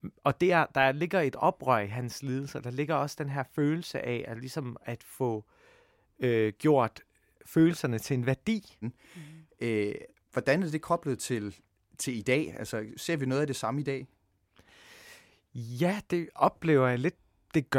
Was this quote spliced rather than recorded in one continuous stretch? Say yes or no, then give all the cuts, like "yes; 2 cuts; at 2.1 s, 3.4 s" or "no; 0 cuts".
yes; 1 cut; at 8.8 s